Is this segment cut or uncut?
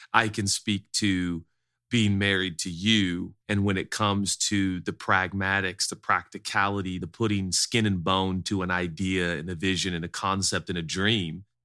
cut